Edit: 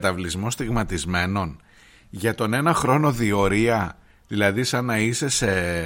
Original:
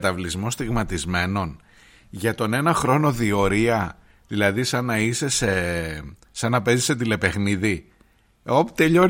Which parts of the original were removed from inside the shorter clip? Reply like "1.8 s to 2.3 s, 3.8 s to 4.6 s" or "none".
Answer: none